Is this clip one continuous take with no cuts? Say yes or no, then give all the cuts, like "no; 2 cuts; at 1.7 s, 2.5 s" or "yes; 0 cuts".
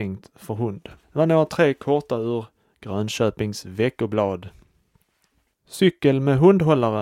no; 2 cuts; at 1.0 s, 5.5 s